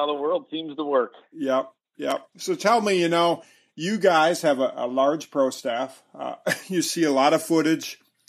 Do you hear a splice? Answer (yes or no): no